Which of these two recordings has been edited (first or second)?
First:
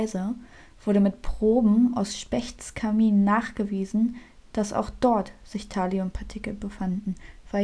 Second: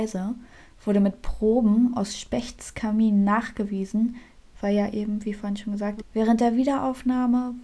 second